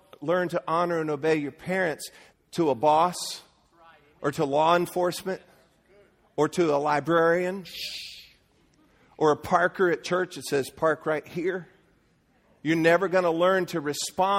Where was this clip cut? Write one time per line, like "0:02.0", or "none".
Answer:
0:02.3